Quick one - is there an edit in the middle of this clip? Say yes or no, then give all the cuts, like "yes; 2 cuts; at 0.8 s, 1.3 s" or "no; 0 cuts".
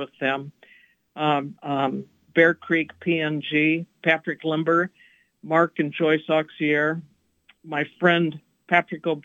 yes; 1 cut; at 1.6 s